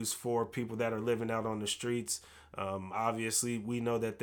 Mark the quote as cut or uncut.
uncut